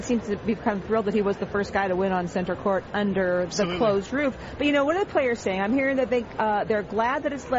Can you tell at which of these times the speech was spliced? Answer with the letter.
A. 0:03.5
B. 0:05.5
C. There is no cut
A